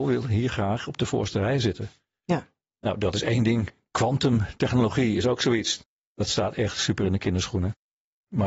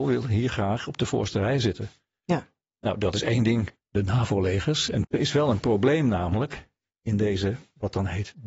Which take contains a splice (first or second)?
second